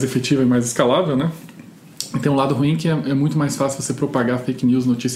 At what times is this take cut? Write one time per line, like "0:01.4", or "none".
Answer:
none